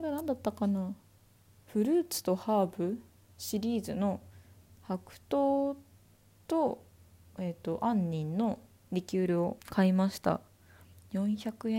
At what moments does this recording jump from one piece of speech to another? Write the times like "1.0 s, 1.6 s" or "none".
9.6 s